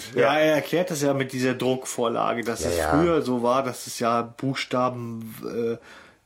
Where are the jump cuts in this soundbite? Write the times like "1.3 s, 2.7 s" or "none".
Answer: none